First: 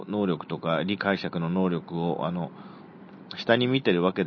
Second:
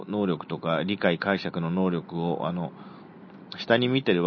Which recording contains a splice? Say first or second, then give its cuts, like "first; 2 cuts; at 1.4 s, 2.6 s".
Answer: first; 1 cut; at 1.0 s